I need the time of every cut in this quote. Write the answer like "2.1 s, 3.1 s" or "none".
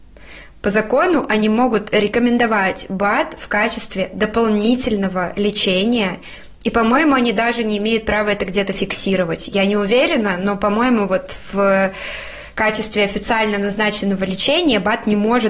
none